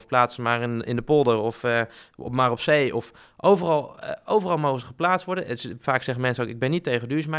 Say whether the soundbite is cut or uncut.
uncut